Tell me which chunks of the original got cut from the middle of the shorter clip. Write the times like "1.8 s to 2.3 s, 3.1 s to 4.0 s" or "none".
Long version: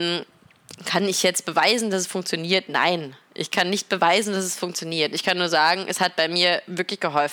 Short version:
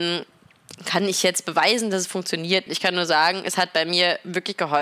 2.7 s to 5.1 s